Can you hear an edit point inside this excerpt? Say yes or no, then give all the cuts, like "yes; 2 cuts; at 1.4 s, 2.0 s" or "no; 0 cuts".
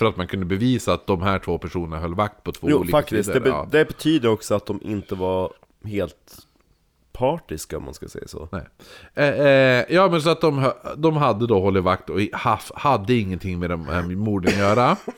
no; 0 cuts